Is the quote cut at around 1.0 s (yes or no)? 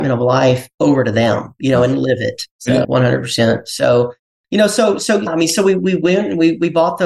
no